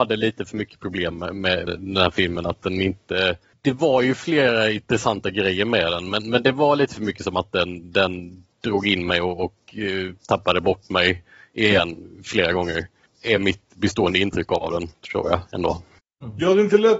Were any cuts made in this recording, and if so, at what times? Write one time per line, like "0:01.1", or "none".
0:01.7